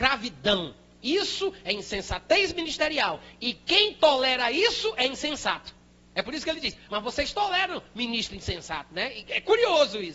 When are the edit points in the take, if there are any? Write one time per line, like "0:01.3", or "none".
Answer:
0:06.9